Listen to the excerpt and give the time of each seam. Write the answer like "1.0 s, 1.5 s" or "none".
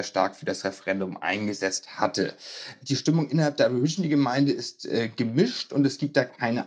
none